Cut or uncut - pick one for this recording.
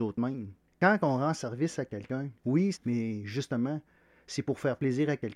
cut